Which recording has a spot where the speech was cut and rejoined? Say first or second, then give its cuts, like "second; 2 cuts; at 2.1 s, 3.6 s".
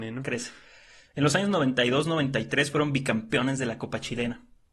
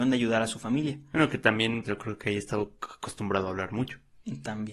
second; 1 cut; at 1.8 s